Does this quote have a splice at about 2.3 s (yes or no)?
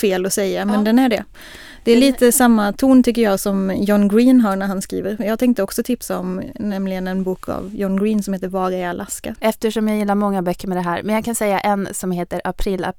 no